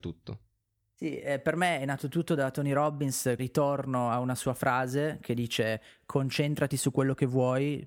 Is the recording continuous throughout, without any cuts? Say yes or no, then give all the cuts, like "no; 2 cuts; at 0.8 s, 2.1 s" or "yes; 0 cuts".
no; 1 cut; at 3.4 s